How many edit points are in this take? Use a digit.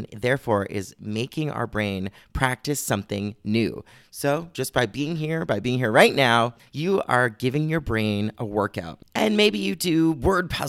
2